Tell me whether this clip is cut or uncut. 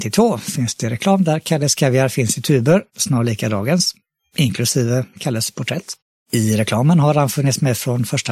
uncut